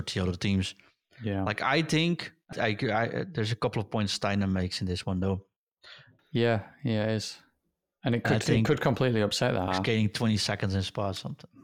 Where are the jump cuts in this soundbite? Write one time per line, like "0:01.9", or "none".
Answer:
0:02.5
0:06.2
0:09.7